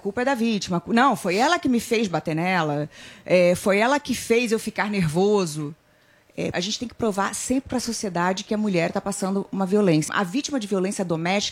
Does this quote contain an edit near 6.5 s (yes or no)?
yes